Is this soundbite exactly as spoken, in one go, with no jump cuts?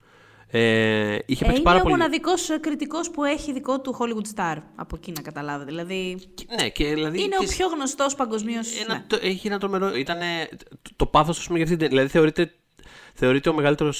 no; 1 cut; at 9.9 s

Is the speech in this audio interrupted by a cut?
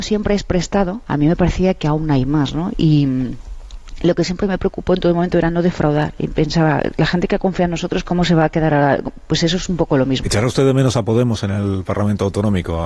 yes; 1 cut; at 10.2 s

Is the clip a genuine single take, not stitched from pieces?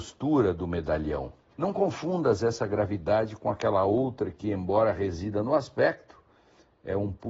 yes; 0 cuts

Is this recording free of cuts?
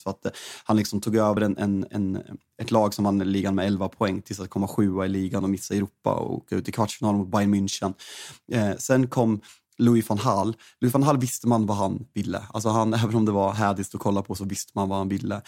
yes; 0 cuts

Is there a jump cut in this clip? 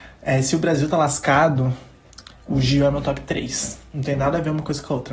no; 0 cuts

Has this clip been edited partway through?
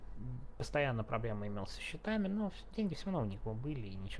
no; 0 cuts

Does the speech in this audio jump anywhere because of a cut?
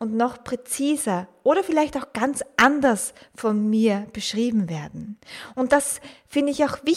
no; 0 cuts

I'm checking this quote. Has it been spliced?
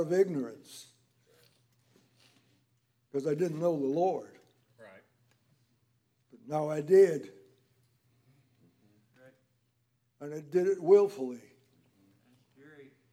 no; 0 cuts

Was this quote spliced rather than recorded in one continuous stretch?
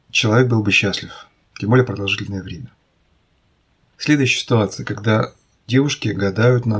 no; 0 cuts

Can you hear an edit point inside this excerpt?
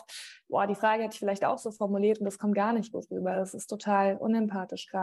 no; 0 cuts

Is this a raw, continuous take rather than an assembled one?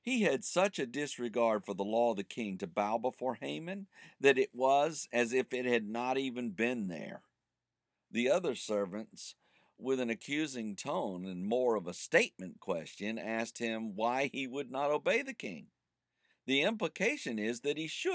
yes; 0 cuts

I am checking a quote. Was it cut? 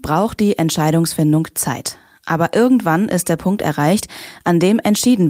no; 0 cuts

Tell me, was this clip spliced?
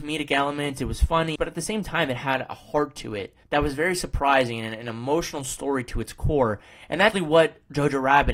yes; 3 cuts; at 1.4 s, 3.4 s, 7.1 s

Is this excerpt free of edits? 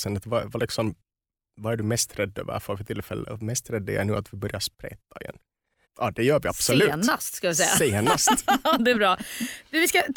no; 1 cut; at 5.8 s

